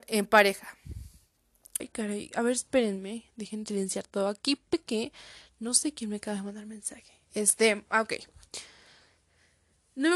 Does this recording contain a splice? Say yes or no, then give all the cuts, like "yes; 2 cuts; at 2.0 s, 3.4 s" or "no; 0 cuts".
yes; 1 cut; at 1.8 s